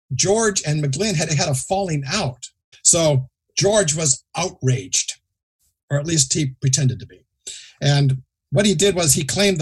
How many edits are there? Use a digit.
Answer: 2